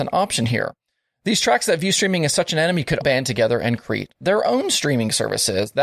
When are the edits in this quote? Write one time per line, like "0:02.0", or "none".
0:03.0